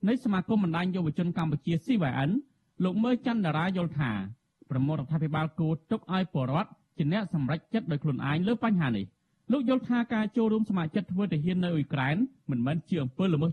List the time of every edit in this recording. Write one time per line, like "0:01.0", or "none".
none

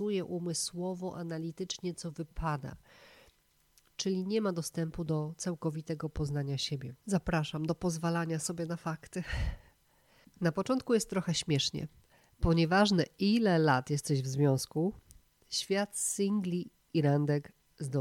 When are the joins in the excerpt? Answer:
0:07.0
0:10.3

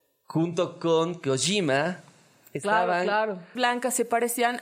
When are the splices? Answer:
0:03.6

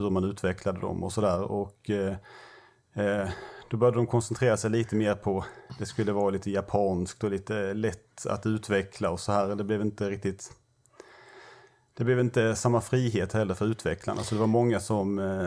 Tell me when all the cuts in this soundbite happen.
none

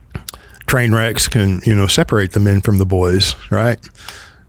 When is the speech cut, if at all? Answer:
none

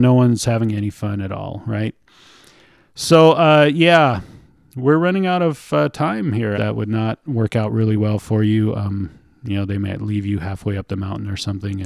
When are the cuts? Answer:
0:06.5

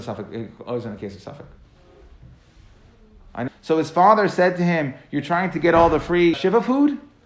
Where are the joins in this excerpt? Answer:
0:03.5
0:06.3

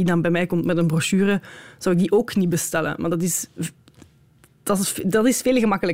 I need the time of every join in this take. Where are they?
none

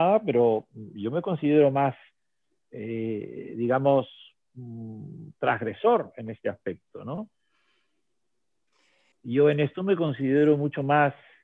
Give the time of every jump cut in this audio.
0:09.1

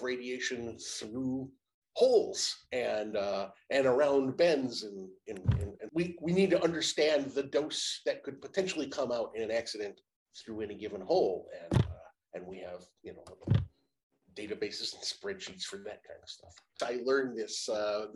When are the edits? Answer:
0:05.9
0:16.8

